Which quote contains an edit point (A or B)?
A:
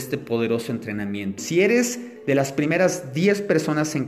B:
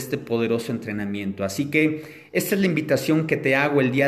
A